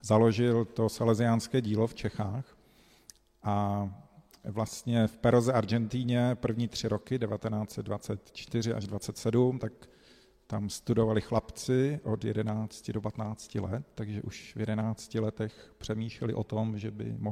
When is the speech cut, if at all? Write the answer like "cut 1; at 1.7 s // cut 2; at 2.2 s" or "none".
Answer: none